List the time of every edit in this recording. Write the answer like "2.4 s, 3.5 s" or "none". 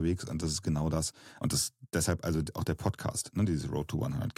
1.4 s

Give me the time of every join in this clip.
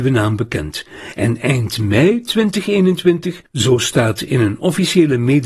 3.5 s

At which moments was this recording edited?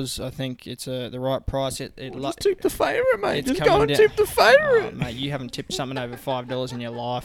none

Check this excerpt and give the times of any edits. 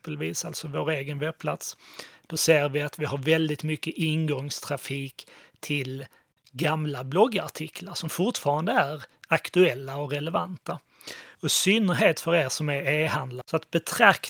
11.3 s, 13.4 s

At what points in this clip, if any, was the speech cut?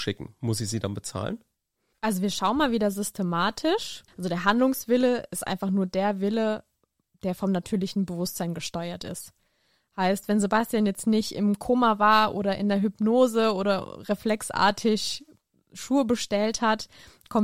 4.1 s

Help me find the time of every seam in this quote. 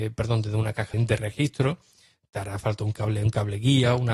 0.9 s

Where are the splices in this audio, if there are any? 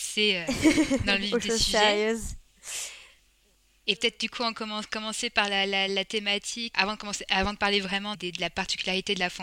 6.7 s, 8.1 s

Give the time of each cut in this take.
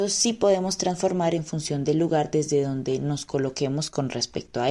none

